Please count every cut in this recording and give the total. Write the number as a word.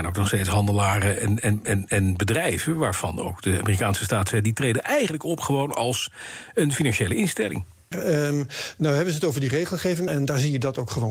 two